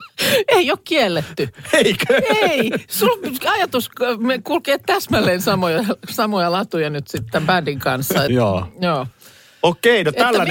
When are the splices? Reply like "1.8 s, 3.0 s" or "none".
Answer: 8.3 s